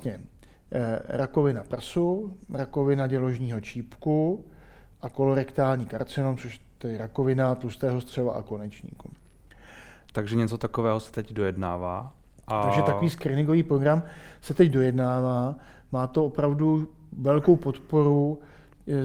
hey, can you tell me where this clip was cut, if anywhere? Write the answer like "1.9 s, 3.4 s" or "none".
10.1 s